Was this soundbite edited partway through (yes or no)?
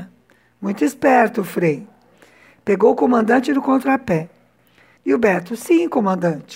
yes